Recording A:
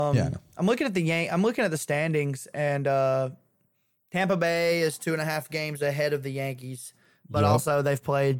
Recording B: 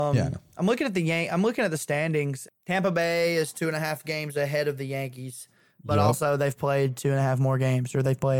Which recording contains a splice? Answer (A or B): B